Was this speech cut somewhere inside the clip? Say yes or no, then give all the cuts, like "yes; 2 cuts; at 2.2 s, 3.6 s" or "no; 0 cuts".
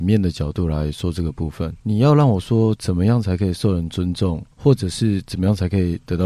yes; 2 cuts; at 1.8 s, 4.5 s